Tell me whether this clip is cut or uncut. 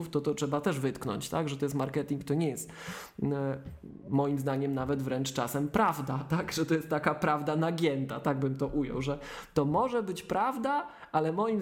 uncut